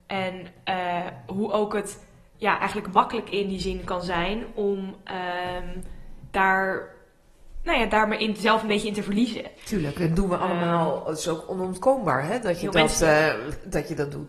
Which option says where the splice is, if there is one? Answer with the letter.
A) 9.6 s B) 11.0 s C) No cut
A